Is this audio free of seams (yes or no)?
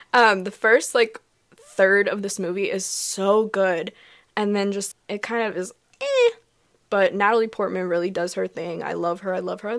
no